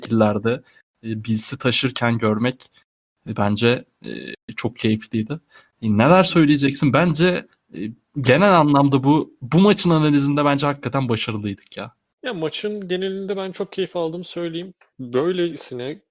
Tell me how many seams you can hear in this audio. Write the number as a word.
two